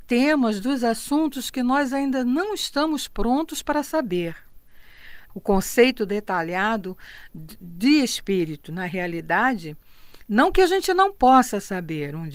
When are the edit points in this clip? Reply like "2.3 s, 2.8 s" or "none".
5.3 s